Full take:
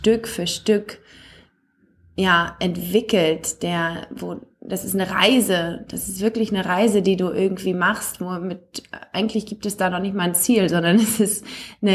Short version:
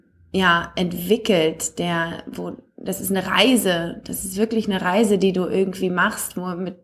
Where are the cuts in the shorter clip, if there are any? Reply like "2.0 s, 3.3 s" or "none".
none